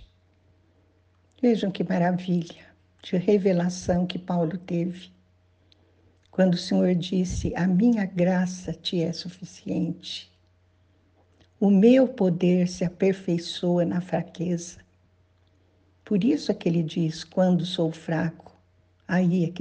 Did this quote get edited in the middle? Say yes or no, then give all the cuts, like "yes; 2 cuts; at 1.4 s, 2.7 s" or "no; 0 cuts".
no; 0 cuts